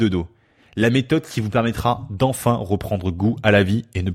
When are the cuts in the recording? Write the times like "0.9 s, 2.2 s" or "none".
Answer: none